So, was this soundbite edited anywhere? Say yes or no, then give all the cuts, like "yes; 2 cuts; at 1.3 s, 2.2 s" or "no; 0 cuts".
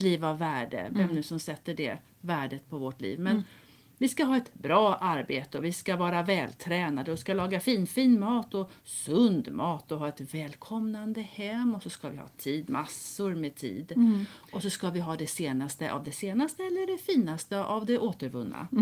no; 0 cuts